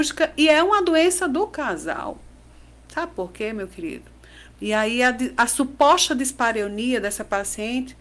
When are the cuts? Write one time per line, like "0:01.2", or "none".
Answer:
0:04.5

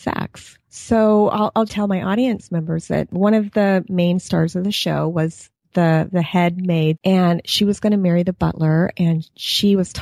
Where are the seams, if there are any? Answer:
0:01.7
0:07.0

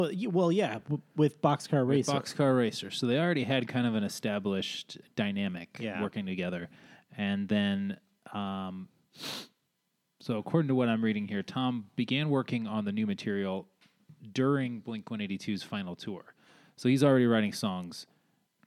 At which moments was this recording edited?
0:05.0

